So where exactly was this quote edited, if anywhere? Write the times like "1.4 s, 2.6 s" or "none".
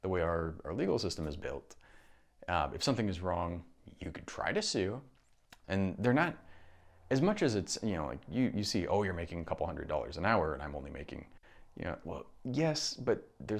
5.6 s